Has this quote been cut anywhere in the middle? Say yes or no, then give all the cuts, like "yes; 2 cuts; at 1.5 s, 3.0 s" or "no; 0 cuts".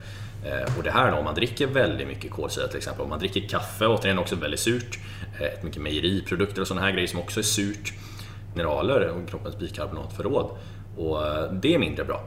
yes; 2 cuts; at 4.4 s, 8.6 s